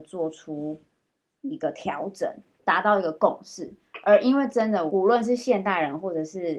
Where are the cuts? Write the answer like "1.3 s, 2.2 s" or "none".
2.6 s, 4.9 s

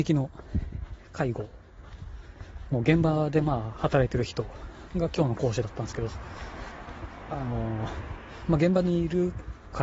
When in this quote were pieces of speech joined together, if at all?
none

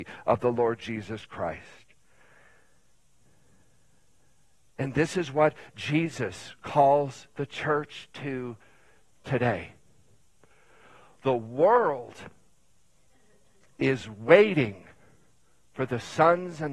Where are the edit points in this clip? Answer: none

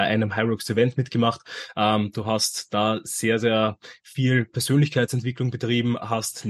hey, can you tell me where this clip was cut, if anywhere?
none

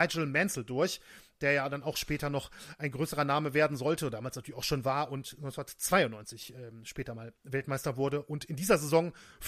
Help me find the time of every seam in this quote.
none

